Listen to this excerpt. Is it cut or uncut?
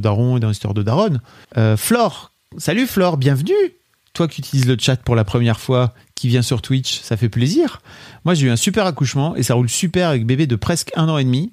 cut